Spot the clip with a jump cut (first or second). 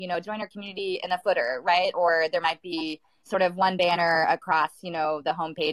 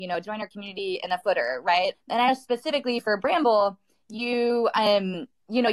second